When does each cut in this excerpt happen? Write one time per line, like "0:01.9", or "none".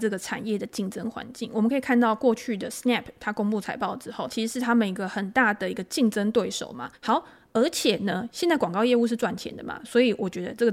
0:04.3
0:06.9

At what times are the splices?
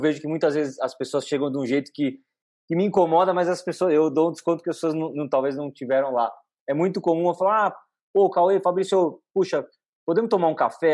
none

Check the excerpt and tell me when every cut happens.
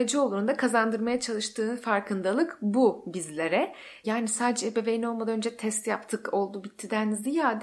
0:04.0

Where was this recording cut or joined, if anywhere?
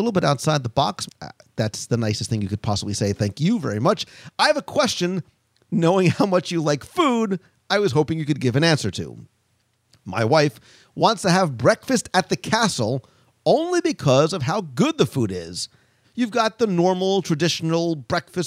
0:01.1
0:16.0

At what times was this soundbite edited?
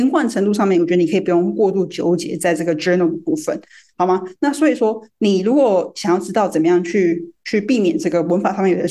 none

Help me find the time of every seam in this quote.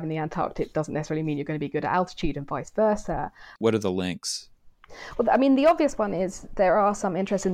0:03.6

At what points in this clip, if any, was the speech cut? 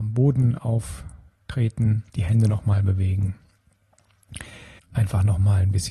0:02.1
0:04.8

